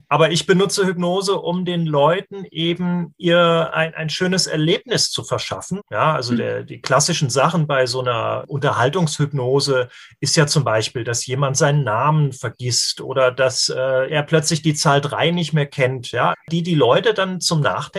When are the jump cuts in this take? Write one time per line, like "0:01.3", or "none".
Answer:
0:05.8
0:14.1
0:16.3